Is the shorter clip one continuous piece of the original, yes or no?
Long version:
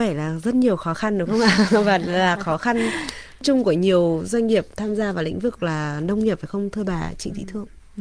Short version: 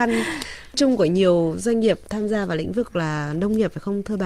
yes